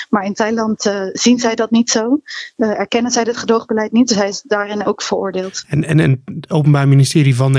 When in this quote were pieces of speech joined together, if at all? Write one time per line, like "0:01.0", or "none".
none